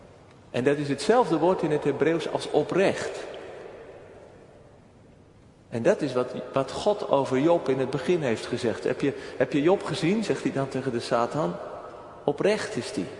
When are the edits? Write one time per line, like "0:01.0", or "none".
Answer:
none